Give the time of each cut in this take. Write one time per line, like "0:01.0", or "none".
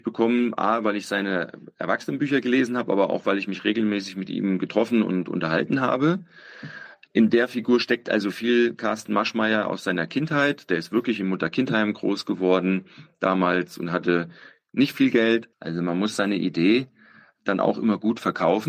0:15.5